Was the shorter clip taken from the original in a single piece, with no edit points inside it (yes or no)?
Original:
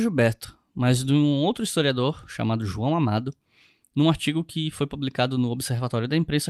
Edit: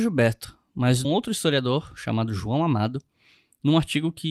no